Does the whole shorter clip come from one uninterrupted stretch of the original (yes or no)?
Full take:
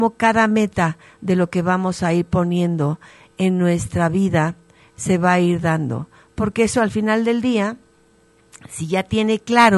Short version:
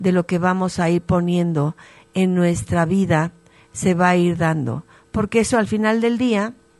yes